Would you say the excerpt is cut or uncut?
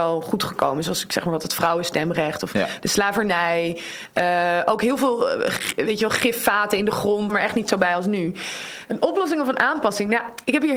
cut